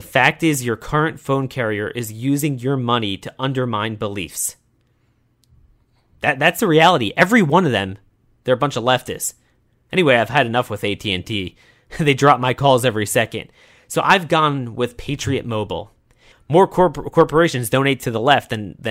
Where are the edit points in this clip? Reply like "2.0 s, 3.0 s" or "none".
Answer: 16.3 s